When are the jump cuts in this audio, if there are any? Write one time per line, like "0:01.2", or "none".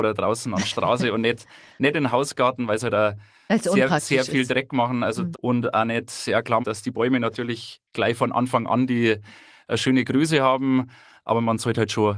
0:05.3
0:06.6